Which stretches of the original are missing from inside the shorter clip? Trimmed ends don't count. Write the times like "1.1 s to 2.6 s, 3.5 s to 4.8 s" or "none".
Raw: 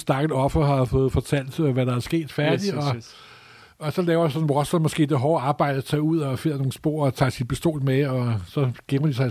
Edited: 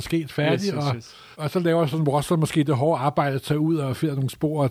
3.3 s to 3.8 s